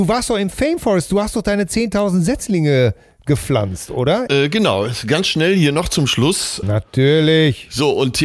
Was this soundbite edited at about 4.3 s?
yes; 2 cuts; at 4.3 s, 6.6 s

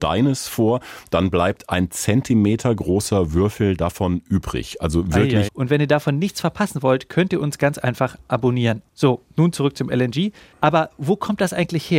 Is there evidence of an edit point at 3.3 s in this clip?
no; 3 cuts; at 5.5 s, 8.9 s, 10.5 s

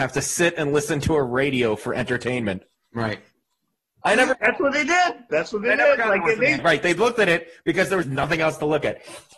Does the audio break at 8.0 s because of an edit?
yes; 2 cuts; at 6.6 s, 8.0 s

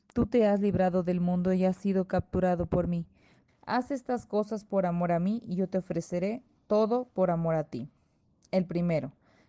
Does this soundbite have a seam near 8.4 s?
no; 1 cut; at 3.5 s

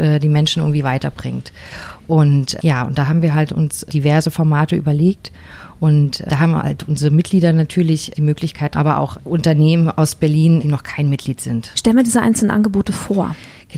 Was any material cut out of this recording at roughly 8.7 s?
yes; 2 cuts; at 8.7 s, 11.7 s

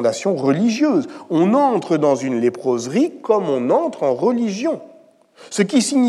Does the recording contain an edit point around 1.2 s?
no; 0 cuts

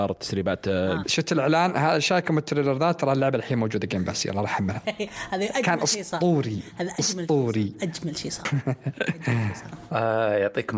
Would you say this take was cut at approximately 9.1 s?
no; 1 cut; at 1.0 s

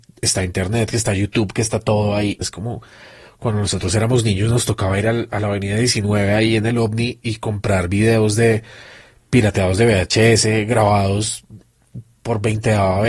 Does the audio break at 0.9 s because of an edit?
no; 1 cut; at 2.4 s

